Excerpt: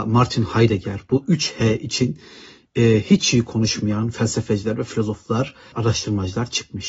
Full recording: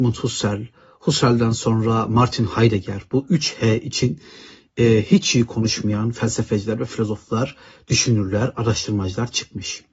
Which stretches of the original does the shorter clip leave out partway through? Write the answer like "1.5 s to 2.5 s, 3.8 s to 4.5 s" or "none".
7.7 s to 8.5 s